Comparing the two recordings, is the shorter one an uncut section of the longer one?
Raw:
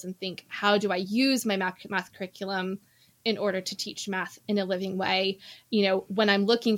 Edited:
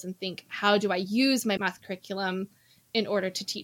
no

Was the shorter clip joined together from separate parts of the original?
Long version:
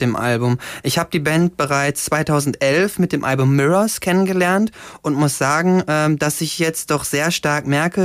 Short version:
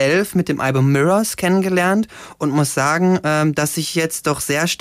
no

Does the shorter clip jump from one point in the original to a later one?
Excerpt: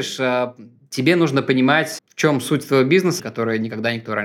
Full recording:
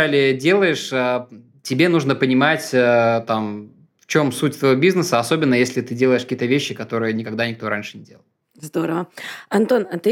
yes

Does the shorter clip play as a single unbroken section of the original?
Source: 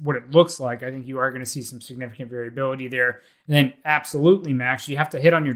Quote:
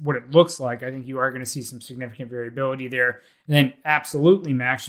yes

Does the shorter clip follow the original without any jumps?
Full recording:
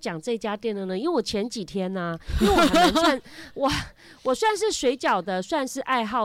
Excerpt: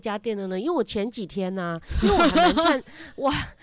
yes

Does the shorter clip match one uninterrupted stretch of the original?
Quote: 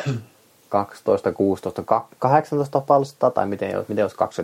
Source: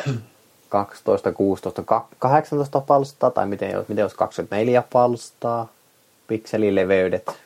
yes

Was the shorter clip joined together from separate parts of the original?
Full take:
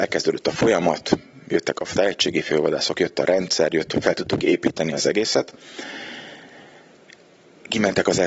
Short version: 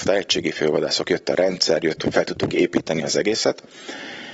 no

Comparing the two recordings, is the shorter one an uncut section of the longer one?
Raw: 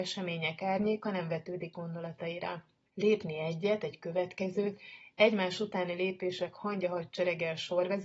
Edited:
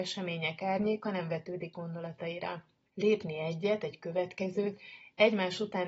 yes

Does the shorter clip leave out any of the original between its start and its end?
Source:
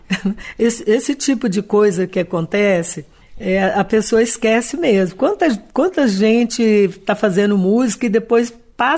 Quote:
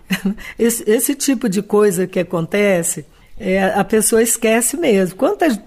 no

